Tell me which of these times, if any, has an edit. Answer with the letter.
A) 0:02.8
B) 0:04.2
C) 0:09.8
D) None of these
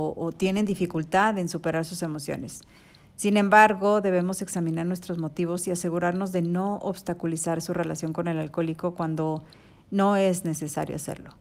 D